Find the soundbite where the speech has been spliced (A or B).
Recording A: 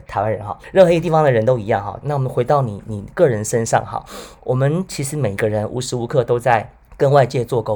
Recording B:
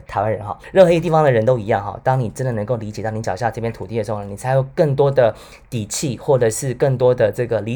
A